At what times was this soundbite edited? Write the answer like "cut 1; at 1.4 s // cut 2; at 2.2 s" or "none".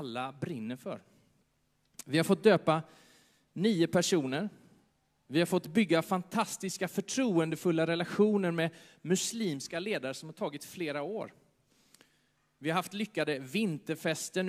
none